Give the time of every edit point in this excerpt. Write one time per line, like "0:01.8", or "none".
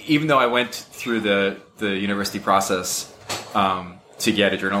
none

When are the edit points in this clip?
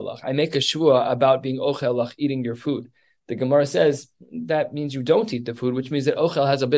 none

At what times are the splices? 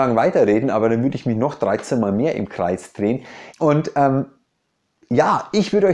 0:03.5

